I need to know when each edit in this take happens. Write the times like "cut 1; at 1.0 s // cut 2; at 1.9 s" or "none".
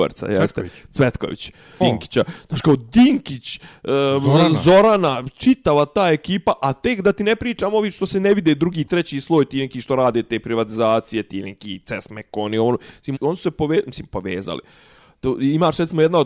cut 1; at 1.8 s // cut 2; at 13.2 s